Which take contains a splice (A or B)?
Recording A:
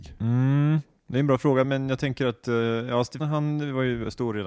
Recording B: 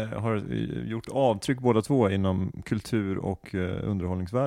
A